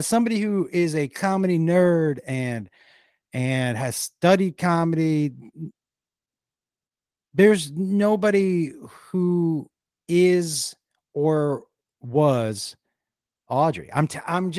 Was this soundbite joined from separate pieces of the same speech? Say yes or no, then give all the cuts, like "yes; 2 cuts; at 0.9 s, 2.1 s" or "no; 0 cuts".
no; 0 cuts